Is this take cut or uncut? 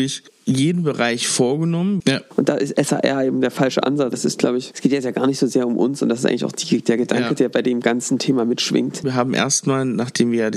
cut